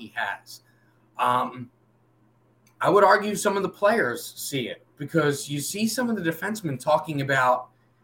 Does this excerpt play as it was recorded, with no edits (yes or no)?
yes